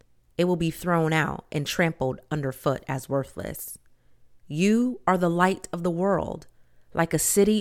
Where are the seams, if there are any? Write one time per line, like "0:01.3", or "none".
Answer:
none